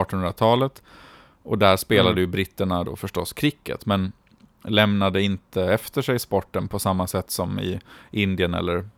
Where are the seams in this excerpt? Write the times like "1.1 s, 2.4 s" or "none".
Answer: none